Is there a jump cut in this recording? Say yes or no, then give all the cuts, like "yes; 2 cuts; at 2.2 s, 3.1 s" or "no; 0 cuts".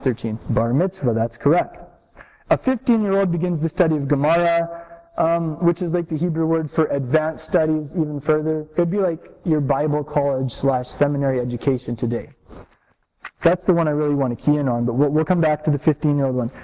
no; 0 cuts